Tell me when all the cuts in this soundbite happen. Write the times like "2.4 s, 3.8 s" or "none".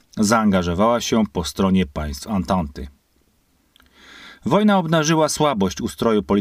none